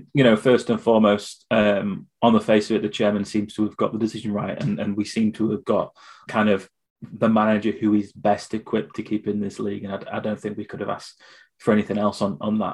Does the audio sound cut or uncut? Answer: cut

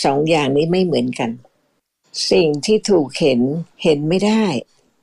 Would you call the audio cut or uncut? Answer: cut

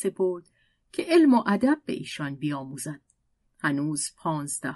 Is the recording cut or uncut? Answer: cut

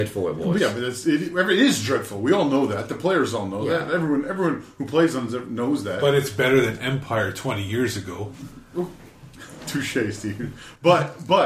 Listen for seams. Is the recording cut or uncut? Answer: uncut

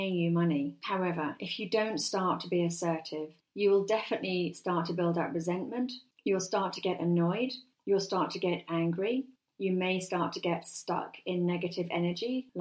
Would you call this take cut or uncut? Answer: uncut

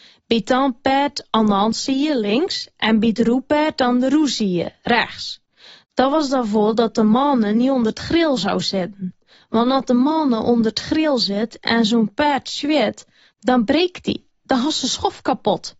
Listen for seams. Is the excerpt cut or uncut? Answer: uncut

